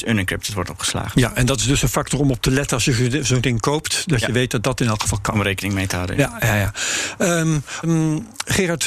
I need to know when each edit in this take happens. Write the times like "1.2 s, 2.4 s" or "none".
7.8 s